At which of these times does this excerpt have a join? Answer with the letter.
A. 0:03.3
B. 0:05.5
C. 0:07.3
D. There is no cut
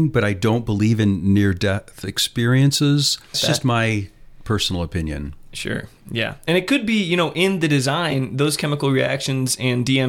A